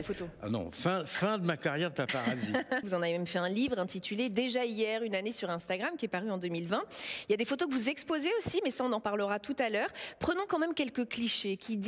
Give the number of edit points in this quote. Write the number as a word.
one